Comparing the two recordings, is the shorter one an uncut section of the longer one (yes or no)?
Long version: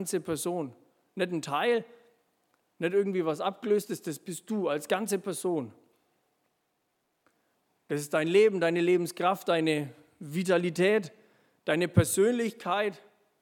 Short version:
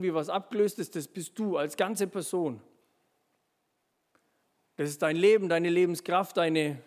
yes